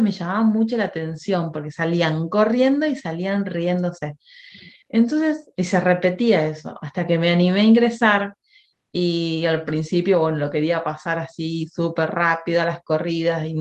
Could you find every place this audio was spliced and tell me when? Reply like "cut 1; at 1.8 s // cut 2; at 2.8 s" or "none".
none

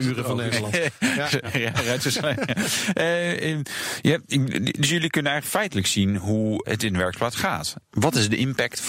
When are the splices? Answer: none

